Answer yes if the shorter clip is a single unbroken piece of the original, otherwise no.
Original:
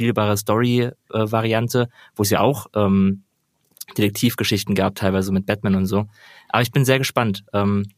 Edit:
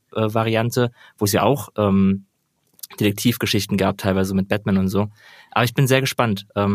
yes